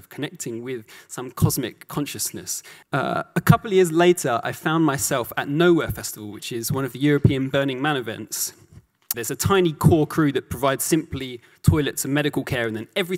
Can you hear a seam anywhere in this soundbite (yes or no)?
yes